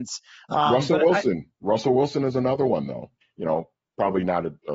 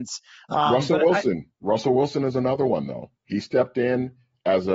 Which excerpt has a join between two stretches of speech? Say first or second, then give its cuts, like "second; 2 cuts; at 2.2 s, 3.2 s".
first; 1 cut; at 3.2 s